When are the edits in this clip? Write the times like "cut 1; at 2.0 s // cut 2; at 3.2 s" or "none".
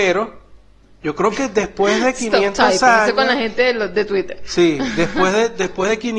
none